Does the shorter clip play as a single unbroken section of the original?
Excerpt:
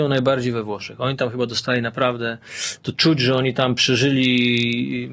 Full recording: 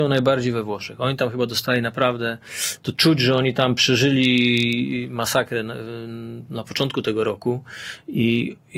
yes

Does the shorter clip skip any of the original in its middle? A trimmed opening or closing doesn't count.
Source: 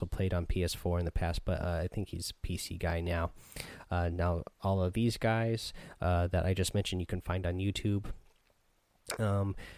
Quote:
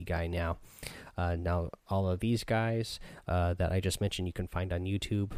no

